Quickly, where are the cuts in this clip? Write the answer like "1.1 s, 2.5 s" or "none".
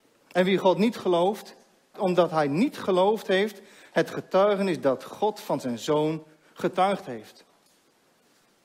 1.9 s